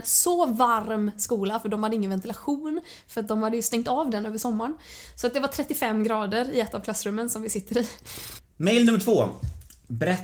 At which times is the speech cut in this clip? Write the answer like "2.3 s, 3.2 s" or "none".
8.4 s

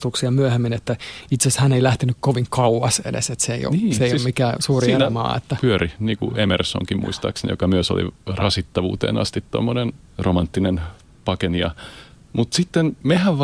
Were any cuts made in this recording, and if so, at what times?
5.6 s

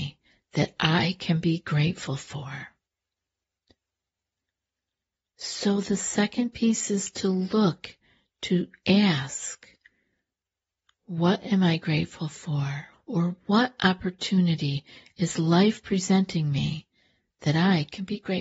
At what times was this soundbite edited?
12.9 s

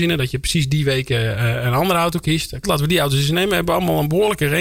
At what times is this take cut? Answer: 2.6 s

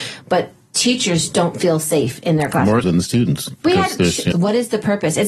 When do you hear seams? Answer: 2.8 s, 4.3 s

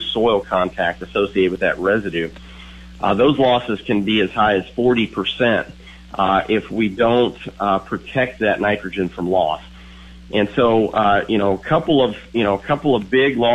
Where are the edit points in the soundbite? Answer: none

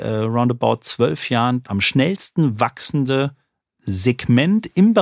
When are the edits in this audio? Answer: 1.6 s

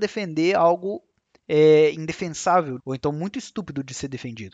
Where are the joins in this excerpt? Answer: 2.8 s

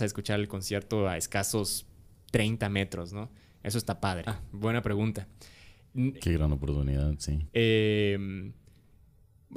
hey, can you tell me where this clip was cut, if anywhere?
4.3 s, 6.2 s, 7.5 s

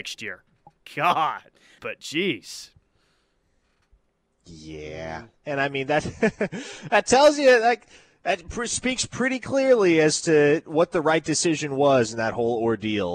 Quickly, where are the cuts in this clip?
1.8 s

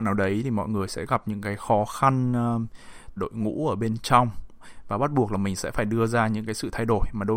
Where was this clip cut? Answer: 3.2 s

